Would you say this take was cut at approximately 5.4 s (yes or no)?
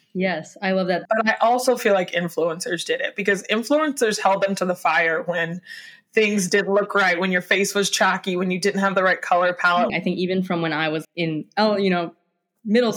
no